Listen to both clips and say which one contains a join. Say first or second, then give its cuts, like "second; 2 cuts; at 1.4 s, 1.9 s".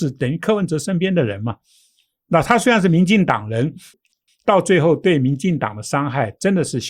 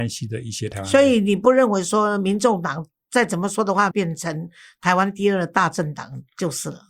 second; 1 cut; at 3.9 s